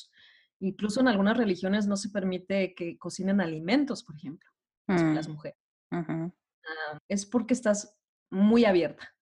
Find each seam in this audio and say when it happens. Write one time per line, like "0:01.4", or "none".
0:07.0